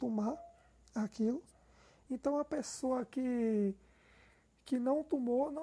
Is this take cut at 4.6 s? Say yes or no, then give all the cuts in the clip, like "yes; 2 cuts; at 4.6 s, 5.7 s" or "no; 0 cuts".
no; 1 cut; at 2.1 s